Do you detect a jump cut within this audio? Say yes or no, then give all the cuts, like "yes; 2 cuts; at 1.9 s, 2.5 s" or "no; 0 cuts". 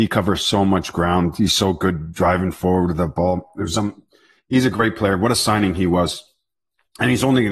no; 0 cuts